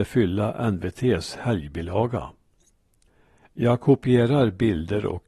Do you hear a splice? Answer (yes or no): no